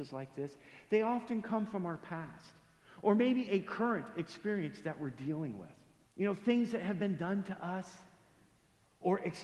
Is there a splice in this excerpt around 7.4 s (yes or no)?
no